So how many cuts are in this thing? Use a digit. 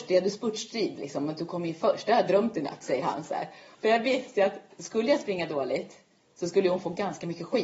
1